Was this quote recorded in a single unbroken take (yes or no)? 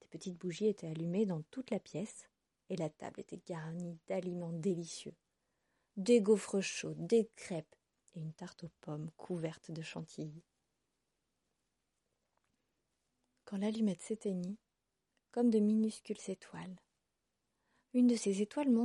no